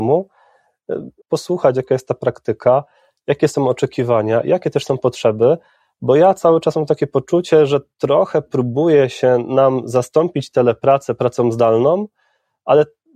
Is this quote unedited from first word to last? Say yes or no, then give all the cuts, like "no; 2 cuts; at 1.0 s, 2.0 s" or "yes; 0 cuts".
no; 1 cut; at 1.2 s